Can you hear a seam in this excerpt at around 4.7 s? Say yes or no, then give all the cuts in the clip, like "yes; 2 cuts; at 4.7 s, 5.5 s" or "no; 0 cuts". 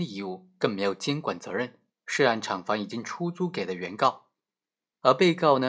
no; 1 cut; at 1.9 s